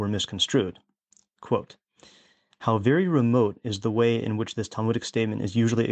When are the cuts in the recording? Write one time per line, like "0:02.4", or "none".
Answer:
none